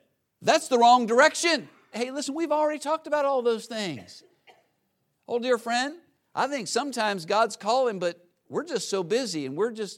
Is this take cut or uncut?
cut